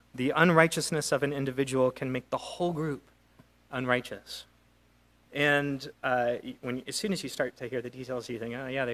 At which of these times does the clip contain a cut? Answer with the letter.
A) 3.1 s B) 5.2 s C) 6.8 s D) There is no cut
B